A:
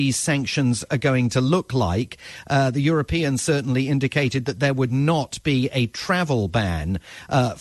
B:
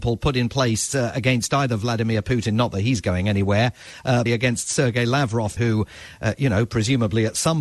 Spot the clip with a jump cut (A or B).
B